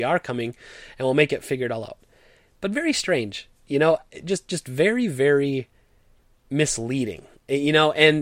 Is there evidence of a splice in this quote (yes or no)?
no